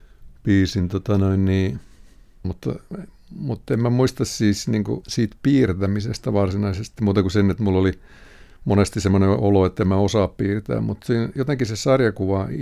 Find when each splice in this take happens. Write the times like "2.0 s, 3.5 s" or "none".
2.4 s, 5.0 s